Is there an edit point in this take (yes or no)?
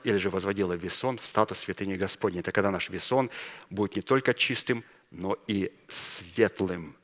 no